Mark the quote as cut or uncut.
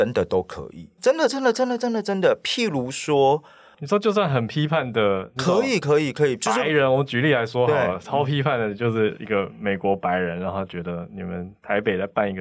cut